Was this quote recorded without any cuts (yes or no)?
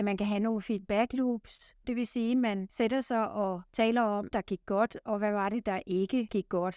no